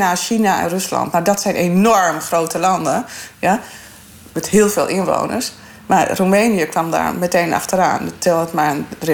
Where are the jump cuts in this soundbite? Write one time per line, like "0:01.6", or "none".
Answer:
none